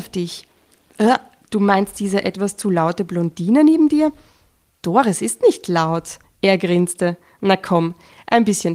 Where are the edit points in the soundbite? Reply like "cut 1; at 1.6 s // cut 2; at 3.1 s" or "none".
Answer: none